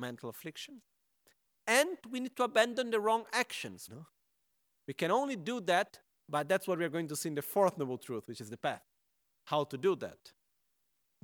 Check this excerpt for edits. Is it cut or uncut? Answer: cut